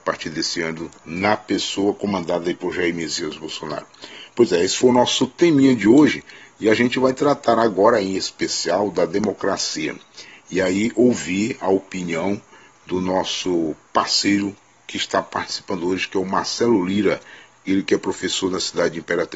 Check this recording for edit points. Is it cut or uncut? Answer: uncut